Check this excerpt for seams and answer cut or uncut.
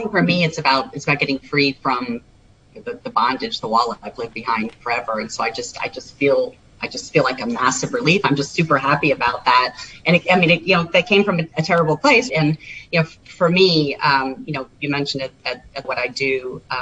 cut